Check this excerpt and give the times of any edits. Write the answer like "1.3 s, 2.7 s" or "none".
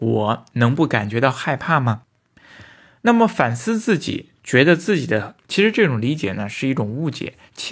5.4 s